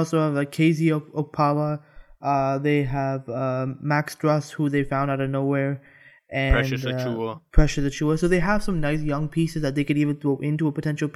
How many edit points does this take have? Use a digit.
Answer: 0